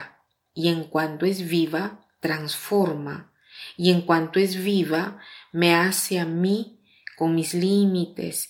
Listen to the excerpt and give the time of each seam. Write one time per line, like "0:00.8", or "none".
none